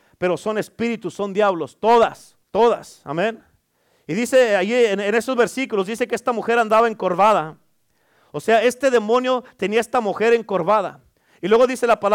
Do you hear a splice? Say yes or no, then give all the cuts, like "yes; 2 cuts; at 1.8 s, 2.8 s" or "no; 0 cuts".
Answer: yes; 1 cut; at 2.4 s